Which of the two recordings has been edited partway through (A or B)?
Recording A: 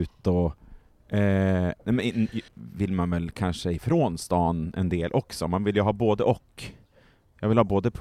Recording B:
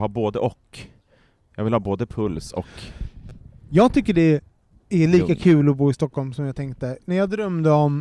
A